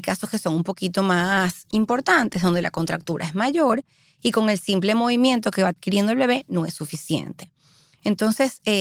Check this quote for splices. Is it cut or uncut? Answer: uncut